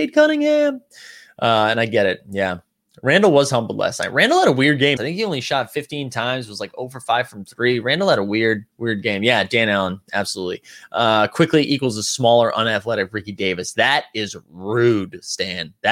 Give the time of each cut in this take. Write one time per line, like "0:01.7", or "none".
0:05.0
0:08.7